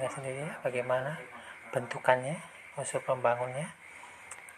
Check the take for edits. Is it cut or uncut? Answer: uncut